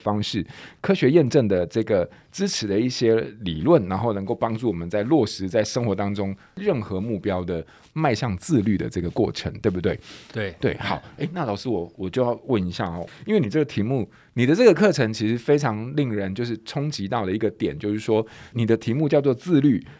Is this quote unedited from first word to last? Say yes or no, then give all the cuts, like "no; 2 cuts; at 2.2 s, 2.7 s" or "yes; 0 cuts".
yes; 0 cuts